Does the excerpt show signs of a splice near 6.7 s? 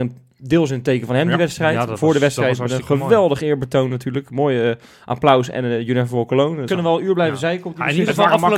yes; 1 cut; at 6.7 s

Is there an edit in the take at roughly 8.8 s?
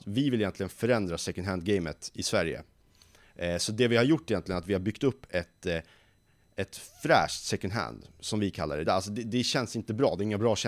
yes; 1 cut; at 8.8 s

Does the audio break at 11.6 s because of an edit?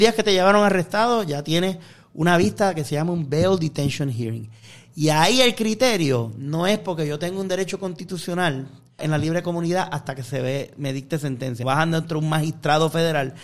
yes; 2 cuts; at 9.0 s, 11.6 s

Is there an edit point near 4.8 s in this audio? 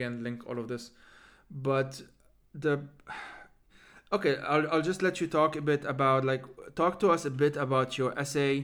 no; 0 cuts

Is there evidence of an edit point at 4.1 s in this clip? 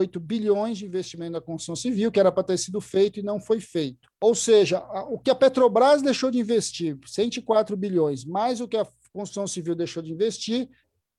yes; 1 cut; at 4.1 s

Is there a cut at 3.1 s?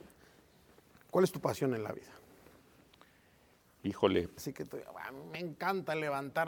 no; 1 cut; at 4.4 s

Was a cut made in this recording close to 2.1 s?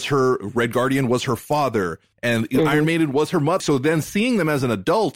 yes; 2 cuts; at 2.1 s, 3.6 s

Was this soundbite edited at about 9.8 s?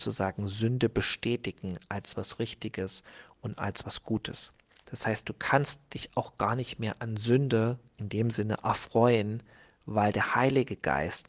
no; 1 cut; at 4.8 s

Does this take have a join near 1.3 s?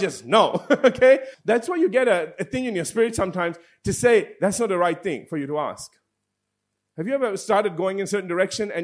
yes; 1 cut; at 1.3 s

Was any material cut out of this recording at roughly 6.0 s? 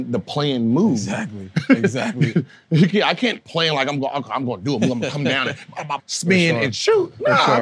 yes; 1 cut; at 6.0 s

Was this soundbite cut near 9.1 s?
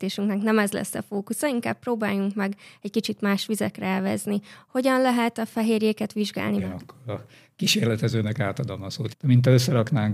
yes; 2 cuts; at 6.6 s, 9.1 s

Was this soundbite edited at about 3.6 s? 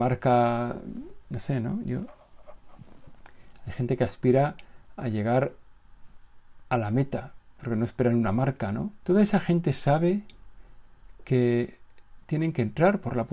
no; 2 cuts; at 7.5 s, 9.0 s

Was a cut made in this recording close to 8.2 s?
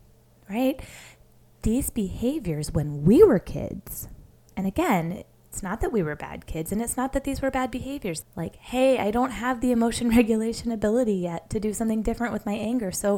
yes; 1 cut; at 8.2 s

